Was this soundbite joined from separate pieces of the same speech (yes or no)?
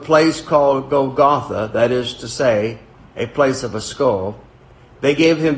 no